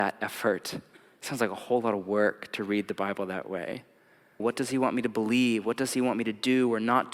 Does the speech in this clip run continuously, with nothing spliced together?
no; 1 cut; at 4.4 s

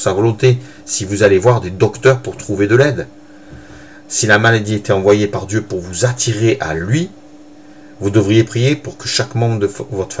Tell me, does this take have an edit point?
no; 0 cuts

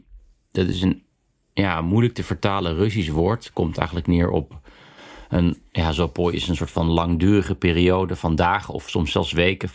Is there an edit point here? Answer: no; 0 cuts

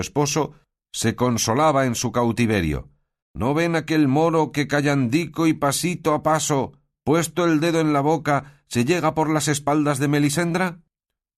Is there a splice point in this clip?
yes; 1 cut; at 3.2 s

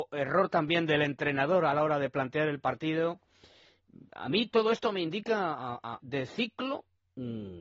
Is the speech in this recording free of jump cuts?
no; 1 cut; at 6.0 s

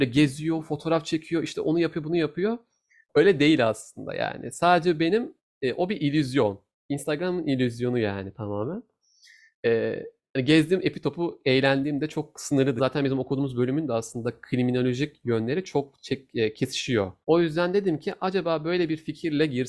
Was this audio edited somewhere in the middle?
yes; 2 cuts; at 12.8 s, 17.2 s

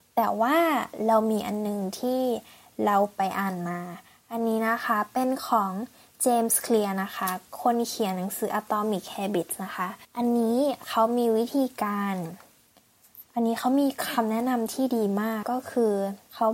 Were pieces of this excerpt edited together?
yes; 3 cuts; at 10.0 s, 13.2 s, 15.4 s

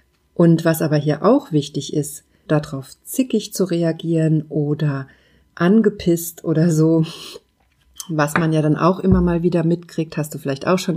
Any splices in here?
yes; 1 cut; at 2.5 s

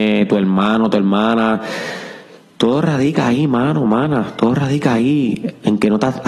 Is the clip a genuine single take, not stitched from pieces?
yes; 0 cuts

